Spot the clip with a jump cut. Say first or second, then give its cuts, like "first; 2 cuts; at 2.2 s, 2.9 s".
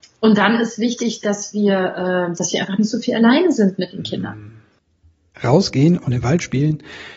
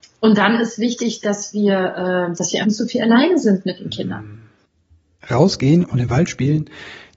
second; 1 cut; at 2.6 s